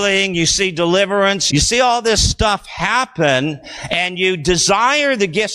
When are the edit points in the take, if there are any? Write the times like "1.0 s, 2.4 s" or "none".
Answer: 1.5 s